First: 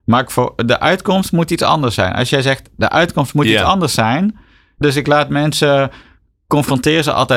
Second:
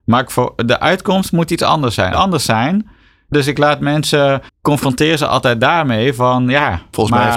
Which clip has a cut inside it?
second; 2 cuts; at 2.1 s, 4.5 s

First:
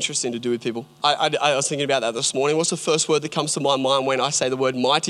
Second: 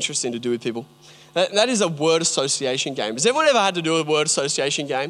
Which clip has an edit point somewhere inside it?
first; 1 cut; at 1.0 s

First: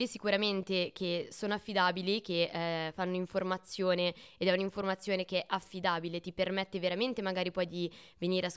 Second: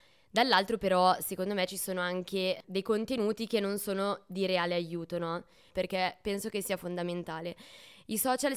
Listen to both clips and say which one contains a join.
second; 1 cut; at 5.7 s

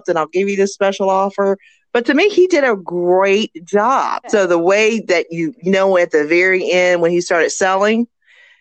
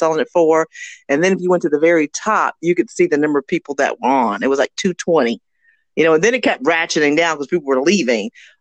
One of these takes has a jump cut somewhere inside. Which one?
first; 1 cut; at 4.2 s

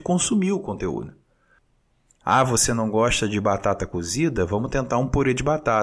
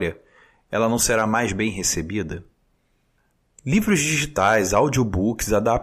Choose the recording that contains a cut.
first; 1 cut; at 2.2 s

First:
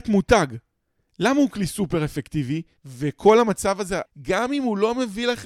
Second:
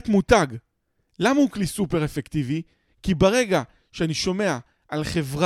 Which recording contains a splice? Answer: first; 2 cuts; at 2.8 s, 4.0 s

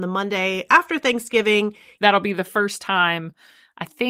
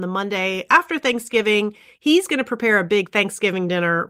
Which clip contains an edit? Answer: first; 1 cut; at 2.0 s

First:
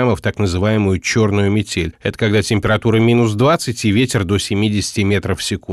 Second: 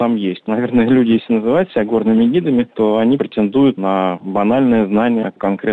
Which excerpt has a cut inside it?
second; 1 cut; at 3.2 s

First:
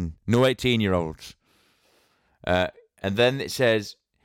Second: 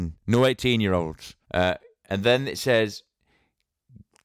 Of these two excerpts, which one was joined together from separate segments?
second; 1 cut; at 1.4 s

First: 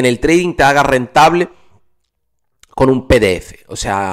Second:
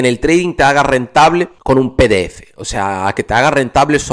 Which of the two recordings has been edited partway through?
second; 1 cut; at 1.6 s

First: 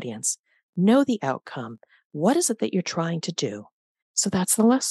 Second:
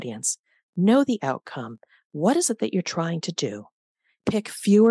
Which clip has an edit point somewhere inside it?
first; 1 cut; at 4.0 s

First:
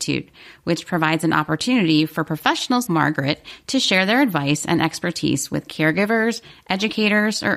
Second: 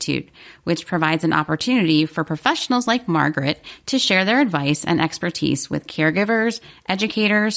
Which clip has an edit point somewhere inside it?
first; 1 cut; at 2.9 s

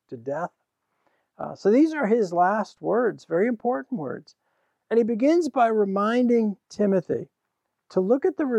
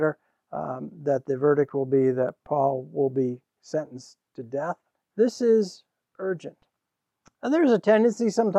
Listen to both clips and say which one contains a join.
second; 1 cut; at 4.9 s

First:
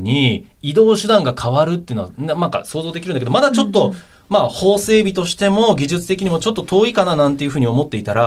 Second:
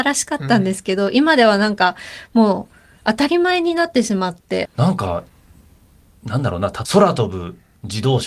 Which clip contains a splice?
second; 2 cuts; at 4.6 s, 6.8 s

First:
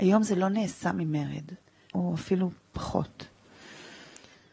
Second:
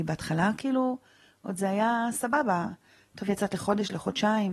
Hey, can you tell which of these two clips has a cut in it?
first; 1 cut; at 1.9 s

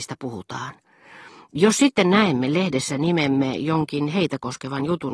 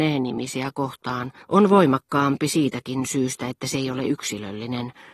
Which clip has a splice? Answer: second; 1 cut; at 1.4 s

